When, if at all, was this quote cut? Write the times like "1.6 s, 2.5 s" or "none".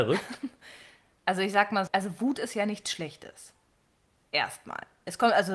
1.9 s